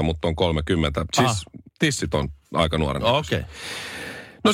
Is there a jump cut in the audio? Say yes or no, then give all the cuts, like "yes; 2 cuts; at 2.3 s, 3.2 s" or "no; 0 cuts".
yes; 1 cut; at 1.7 s